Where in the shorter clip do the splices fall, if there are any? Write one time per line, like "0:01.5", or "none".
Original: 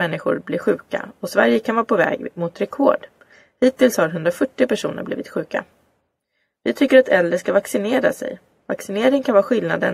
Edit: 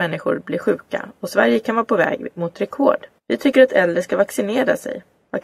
0:03.2